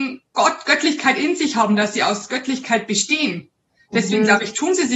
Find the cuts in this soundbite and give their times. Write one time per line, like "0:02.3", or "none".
none